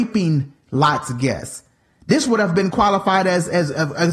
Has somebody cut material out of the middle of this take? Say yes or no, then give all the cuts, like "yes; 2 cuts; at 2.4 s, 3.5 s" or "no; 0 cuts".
no; 0 cuts